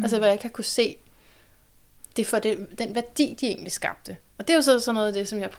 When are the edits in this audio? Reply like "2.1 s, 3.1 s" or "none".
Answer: none